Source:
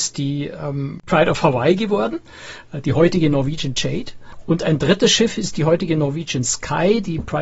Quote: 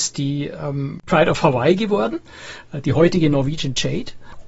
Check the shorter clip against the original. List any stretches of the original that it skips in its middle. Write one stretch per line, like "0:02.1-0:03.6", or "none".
none